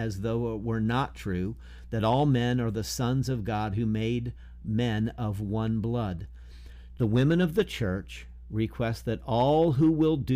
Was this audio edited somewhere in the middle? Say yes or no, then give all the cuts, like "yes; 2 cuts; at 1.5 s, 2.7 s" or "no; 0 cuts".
yes; 1 cut; at 7.0 s